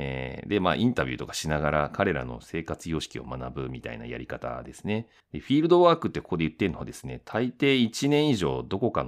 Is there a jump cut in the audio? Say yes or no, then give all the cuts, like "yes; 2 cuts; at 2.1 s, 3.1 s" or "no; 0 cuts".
yes; 1 cut; at 5.2 s